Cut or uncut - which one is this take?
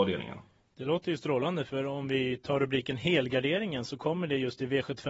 uncut